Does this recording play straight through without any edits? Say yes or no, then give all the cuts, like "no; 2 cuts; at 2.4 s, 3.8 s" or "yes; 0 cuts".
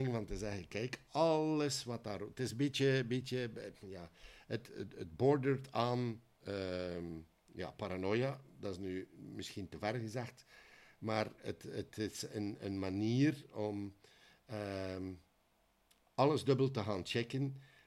yes; 0 cuts